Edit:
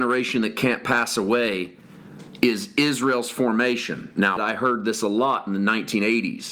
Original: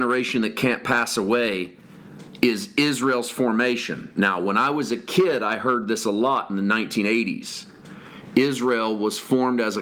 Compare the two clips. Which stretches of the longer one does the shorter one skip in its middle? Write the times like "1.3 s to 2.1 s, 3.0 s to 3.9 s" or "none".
4.4 s to 5.4 s